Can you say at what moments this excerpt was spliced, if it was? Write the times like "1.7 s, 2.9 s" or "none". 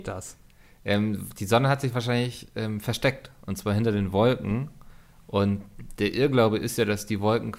none